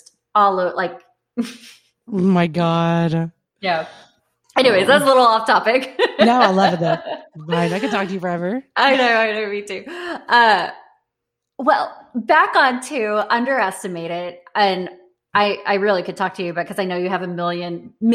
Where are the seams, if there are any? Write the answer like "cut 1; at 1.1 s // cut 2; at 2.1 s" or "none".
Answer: none